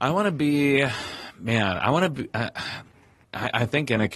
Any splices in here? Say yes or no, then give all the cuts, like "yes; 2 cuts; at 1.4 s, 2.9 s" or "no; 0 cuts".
no; 0 cuts